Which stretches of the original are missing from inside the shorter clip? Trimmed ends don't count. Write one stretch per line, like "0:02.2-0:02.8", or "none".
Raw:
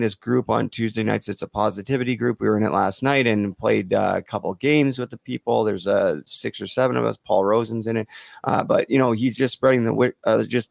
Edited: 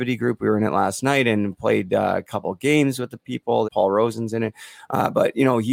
0:05.6-0:07.2